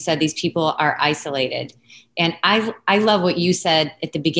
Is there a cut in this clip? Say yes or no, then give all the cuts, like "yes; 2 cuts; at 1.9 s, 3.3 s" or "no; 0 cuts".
no; 0 cuts